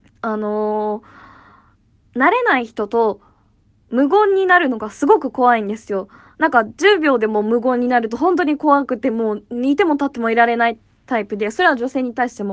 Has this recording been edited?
no; 0 cuts

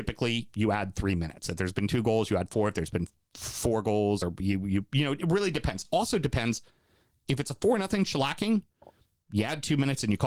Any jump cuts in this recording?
no; 0 cuts

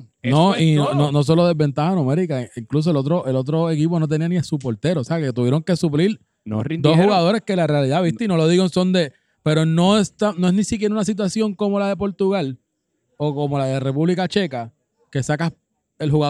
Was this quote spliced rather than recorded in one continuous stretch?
no; 0 cuts

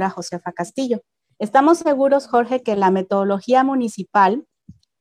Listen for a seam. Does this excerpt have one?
yes; 1 cut; at 1.3 s

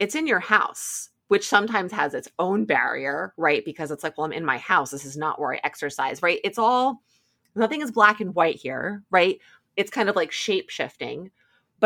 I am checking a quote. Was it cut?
no; 0 cuts

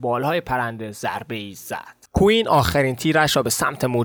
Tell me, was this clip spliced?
yes; 1 cut; at 2.1 s

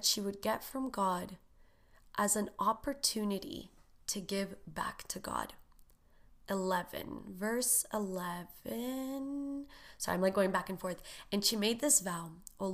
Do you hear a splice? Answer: no; 0 cuts

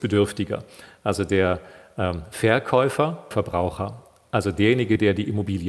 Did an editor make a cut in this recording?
yes; 1 cut; at 3.3 s

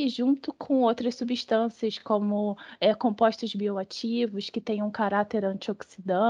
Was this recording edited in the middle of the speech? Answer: no; 0 cuts

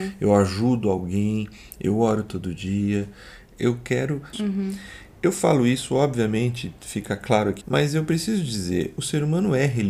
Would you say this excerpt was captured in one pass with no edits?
no; 2 cuts; at 4.3 s, 7.6 s

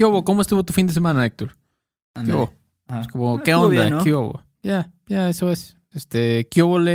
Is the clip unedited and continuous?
no; 1 cut; at 5.9 s

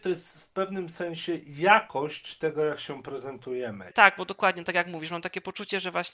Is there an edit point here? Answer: yes; 1 cut; at 3.9 s

